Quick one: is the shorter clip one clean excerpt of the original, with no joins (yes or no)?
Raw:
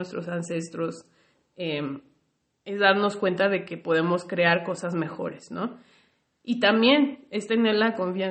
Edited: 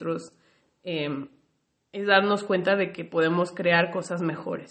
yes